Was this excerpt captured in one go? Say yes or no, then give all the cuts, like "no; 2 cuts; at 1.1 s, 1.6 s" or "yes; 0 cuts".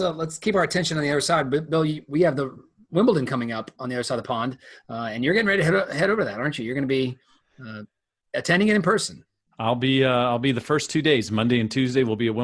no; 1 cut; at 3.8 s